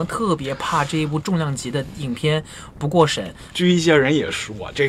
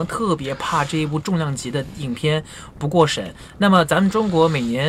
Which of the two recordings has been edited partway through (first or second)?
first